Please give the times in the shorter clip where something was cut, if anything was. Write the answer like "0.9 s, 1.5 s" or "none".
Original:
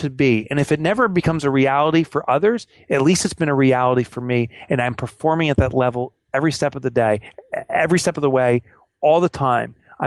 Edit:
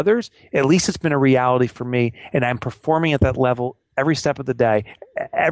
none